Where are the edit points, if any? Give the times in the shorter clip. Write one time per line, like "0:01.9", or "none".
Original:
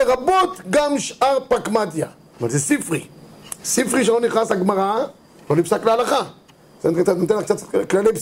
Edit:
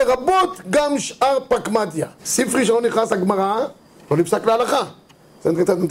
0:02.2

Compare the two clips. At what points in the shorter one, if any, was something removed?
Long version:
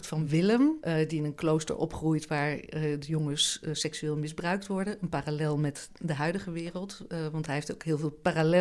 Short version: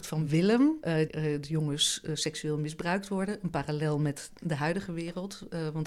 0:01.1

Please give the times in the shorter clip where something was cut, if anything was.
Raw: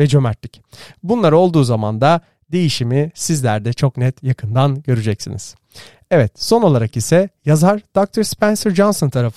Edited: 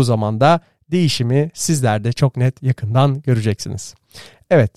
none

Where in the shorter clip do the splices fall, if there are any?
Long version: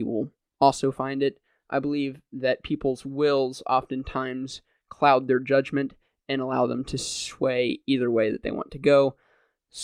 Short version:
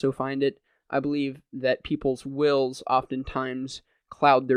none

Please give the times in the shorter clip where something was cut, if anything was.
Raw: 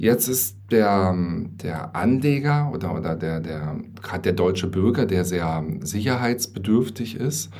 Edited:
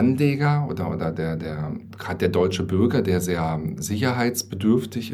none

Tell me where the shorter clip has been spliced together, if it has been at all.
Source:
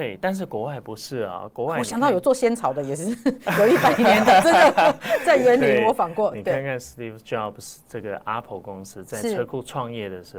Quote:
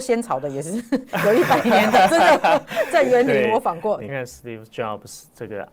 0:04.1

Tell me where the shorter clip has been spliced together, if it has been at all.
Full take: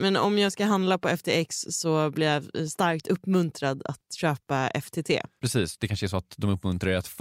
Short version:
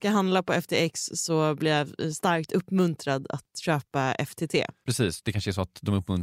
none

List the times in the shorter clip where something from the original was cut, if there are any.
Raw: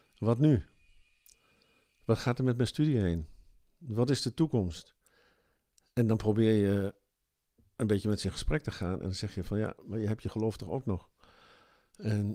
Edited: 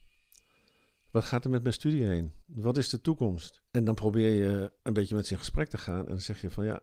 0:02.4
0:03.7
0:04.8

